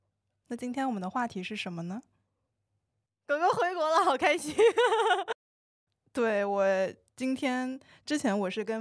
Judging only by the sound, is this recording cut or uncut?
uncut